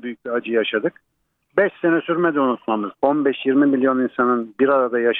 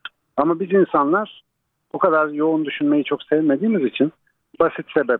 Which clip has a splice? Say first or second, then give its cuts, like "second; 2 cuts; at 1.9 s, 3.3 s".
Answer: first; 1 cut; at 2.9 s